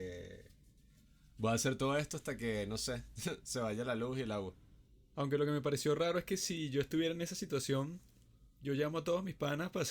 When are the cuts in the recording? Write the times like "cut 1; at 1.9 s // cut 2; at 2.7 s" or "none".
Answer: none